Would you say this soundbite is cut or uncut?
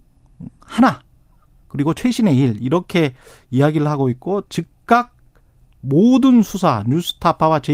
uncut